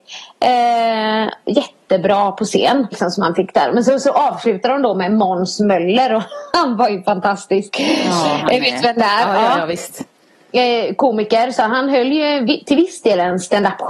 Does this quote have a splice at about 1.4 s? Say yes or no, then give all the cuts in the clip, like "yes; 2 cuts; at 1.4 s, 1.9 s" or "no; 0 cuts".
yes; 2 cuts; at 1.4 s, 2.9 s